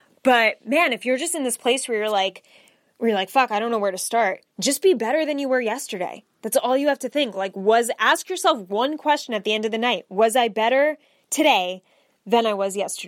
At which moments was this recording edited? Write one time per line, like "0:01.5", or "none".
none